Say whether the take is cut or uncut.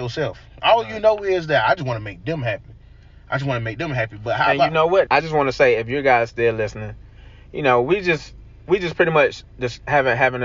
cut